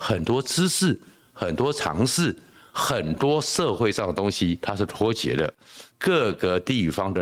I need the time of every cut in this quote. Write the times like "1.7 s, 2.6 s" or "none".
5.9 s